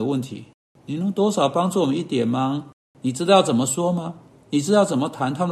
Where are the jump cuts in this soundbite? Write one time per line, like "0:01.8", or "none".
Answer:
0:02.9